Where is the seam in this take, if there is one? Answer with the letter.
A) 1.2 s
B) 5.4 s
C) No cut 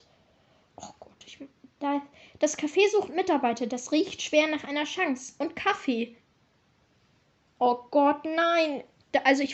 C